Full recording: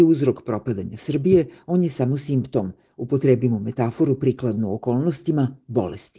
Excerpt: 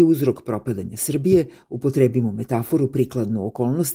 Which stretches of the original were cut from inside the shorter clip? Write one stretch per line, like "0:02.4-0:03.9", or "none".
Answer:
0:01.6-0:02.9